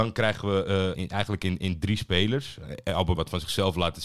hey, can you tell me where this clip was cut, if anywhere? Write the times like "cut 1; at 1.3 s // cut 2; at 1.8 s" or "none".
cut 1; at 0.9 s // cut 2; at 3.2 s

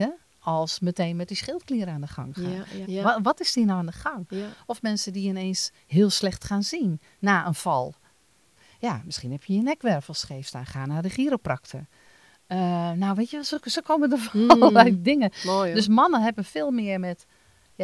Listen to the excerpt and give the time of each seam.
cut 1; at 2.8 s

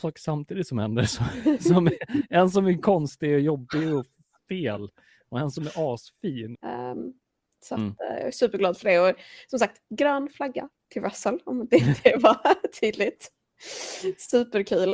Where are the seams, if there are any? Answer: cut 1; at 6.5 s

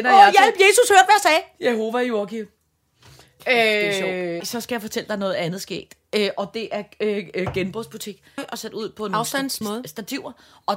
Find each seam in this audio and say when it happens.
cut 1; at 4.4 s // cut 2; at 8.4 s // cut 3; at 9.6 s

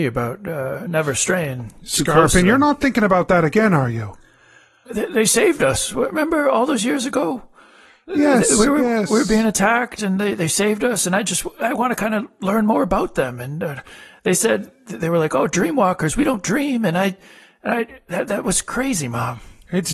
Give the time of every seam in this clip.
cut 1; at 4.9 s

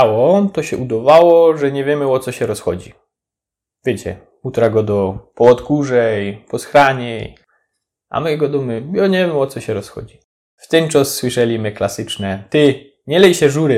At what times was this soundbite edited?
none

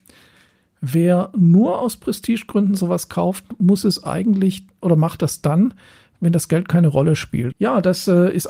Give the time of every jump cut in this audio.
cut 1; at 7.5 s

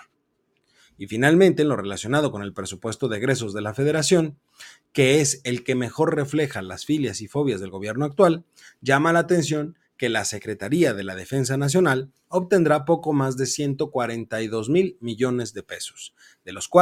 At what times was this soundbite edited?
none

